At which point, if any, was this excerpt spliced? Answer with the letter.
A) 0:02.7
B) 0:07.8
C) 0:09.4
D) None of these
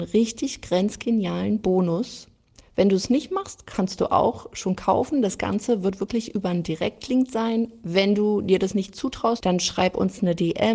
C